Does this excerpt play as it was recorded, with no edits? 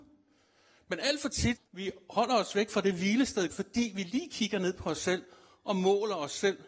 no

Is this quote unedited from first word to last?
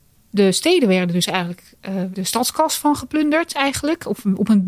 no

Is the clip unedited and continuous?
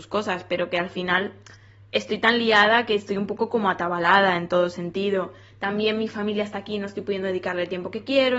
yes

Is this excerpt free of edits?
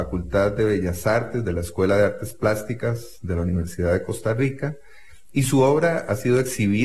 yes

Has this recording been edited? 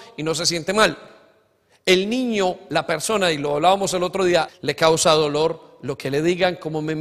yes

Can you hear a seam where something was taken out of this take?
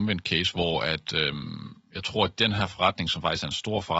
no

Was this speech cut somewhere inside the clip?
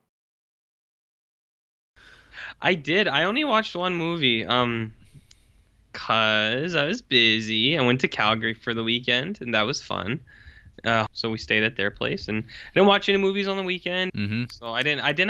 yes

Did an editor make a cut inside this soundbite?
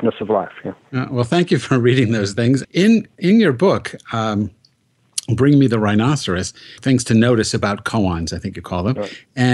yes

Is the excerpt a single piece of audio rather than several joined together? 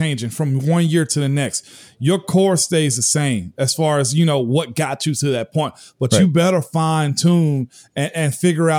yes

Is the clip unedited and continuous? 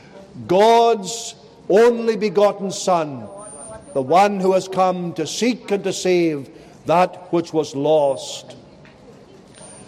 yes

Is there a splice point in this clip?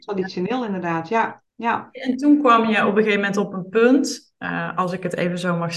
yes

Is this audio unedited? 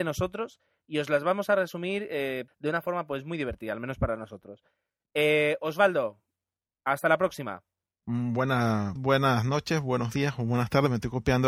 no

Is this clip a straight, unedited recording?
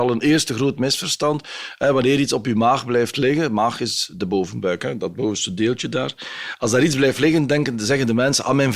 yes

